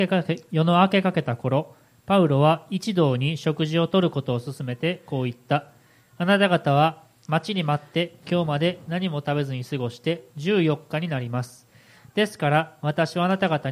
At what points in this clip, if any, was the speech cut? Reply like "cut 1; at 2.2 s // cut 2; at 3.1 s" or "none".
none